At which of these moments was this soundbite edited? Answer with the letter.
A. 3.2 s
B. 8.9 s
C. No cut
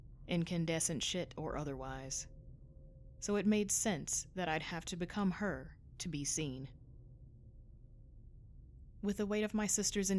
C